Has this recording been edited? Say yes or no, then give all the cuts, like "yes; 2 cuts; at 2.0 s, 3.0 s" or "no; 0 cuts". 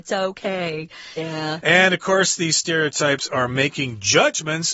yes; 1 cut; at 1.2 s